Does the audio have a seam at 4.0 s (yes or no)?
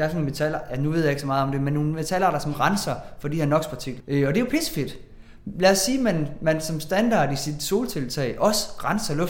yes